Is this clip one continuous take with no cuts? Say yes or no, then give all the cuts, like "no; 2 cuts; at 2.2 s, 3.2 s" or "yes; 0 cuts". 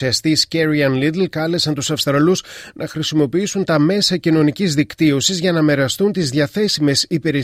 yes; 0 cuts